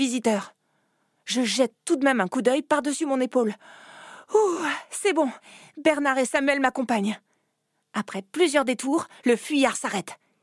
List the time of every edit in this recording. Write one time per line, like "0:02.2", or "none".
none